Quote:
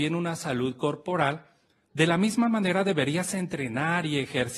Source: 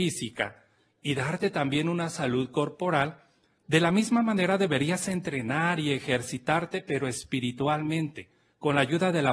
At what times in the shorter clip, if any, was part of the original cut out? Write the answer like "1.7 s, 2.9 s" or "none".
none